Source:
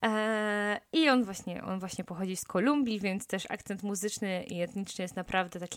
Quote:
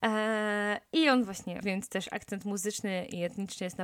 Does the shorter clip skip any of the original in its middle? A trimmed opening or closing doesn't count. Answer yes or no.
yes